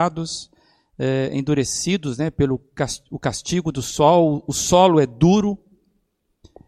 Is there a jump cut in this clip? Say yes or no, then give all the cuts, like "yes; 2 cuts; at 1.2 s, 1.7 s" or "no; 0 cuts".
no; 0 cuts